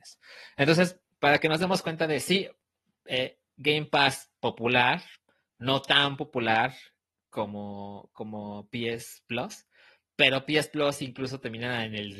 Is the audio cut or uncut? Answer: uncut